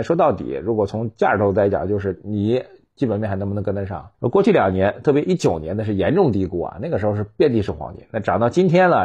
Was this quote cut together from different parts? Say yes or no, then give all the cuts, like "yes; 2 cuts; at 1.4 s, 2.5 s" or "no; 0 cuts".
yes; 1 cut; at 4.1 s